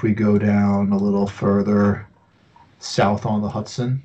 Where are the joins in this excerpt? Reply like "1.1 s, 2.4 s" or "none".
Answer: none

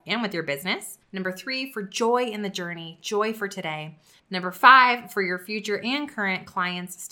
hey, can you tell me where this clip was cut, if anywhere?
4.2 s

